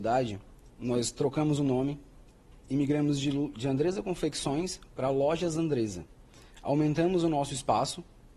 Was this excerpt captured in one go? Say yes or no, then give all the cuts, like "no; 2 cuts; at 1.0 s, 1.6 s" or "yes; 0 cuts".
yes; 0 cuts